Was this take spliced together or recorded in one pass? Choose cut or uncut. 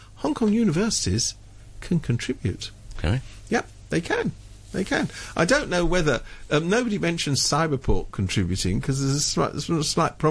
uncut